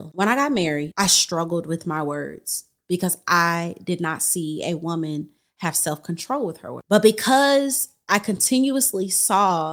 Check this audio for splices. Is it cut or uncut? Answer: uncut